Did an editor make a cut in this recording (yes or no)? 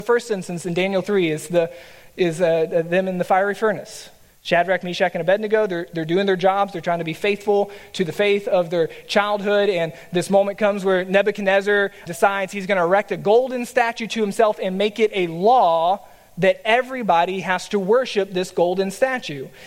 yes